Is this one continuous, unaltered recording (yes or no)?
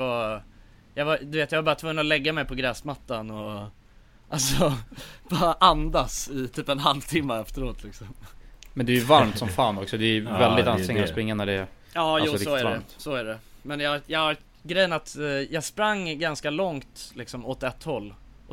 yes